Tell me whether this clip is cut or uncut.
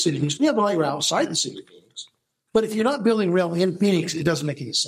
uncut